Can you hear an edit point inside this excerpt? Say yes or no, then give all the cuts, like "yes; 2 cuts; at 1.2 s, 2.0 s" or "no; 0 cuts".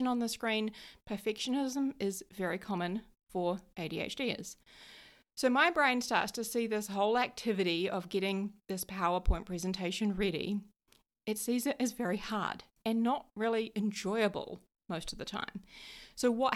no; 0 cuts